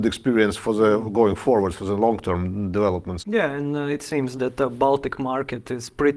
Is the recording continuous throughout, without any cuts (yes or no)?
no